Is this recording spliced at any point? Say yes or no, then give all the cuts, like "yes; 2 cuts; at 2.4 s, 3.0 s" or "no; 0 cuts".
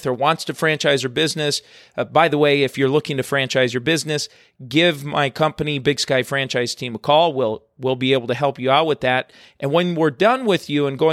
no; 0 cuts